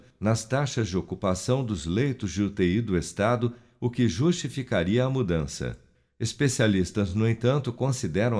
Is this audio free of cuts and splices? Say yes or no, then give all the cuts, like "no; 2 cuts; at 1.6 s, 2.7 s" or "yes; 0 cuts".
yes; 0 cuts